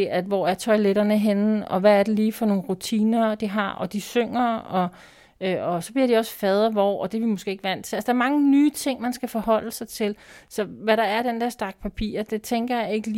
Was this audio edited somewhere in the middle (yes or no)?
no